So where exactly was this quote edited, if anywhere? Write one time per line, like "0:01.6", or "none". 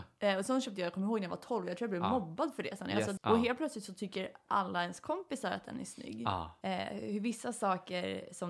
0:03.2
0:06.6